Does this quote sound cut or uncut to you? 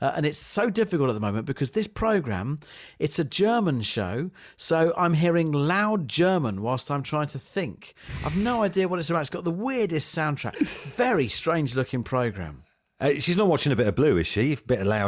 uncut